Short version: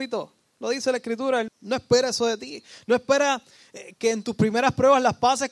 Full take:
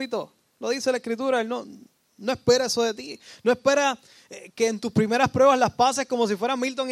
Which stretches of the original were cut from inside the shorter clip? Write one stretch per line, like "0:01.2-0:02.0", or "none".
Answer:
0:01.5-0:02.0